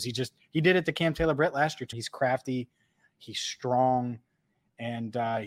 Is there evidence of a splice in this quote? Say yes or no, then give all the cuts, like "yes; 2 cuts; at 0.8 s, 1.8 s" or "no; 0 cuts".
yes; 1 cut; at 1.9 s